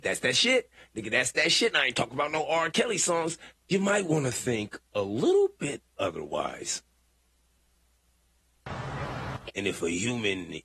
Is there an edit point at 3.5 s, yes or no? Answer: yes